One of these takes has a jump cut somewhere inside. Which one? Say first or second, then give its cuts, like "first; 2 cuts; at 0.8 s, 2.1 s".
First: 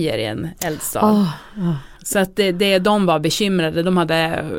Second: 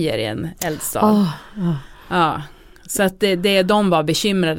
first; 1 cut; at 2.0 s